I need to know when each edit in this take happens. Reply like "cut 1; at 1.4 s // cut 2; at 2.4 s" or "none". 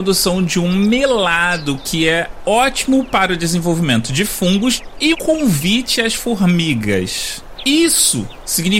cut 1; at 5.1 s // cut 2; at 7.6 s